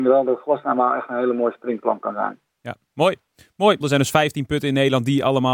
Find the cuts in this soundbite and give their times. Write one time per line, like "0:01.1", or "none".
0:03.8